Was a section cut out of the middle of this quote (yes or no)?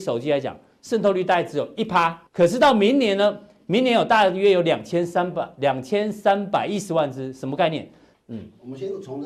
yes